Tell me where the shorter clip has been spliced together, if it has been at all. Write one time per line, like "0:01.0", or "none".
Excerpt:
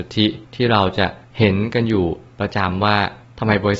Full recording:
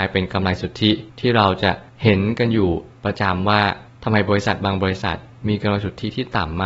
none

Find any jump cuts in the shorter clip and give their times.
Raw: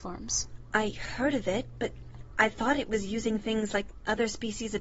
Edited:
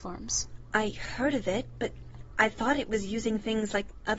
none

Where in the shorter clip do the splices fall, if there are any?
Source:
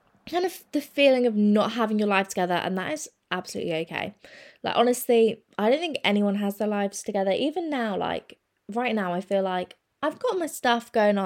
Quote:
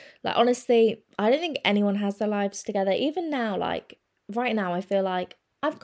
none

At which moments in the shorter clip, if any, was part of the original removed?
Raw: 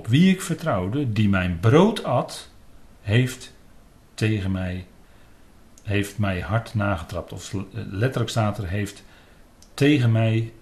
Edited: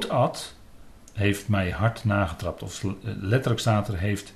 0:01.0

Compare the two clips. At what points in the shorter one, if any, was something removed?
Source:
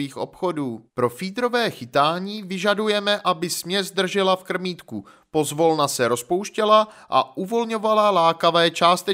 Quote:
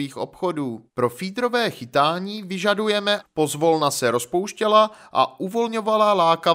0:03.2

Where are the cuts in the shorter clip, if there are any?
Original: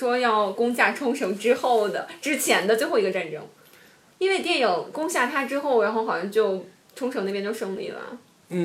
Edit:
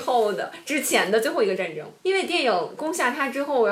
0:02.0

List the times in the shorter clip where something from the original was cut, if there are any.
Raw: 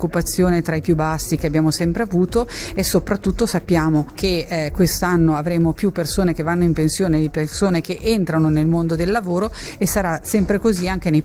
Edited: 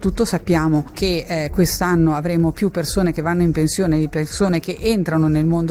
none

